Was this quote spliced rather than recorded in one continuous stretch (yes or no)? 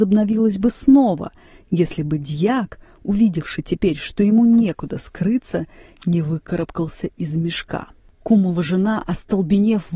no